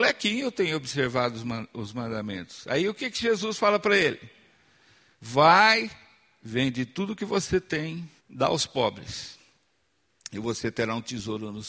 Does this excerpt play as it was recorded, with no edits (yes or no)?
no